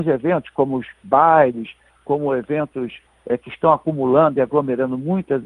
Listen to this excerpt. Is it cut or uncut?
uncut